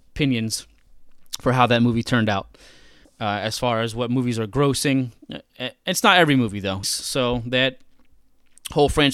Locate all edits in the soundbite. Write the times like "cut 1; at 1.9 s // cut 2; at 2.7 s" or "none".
cut 1; at 3.0 s // cut 2; at 6.8 s